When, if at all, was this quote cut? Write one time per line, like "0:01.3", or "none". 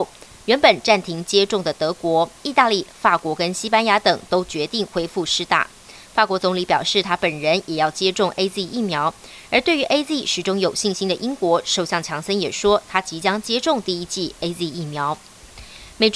none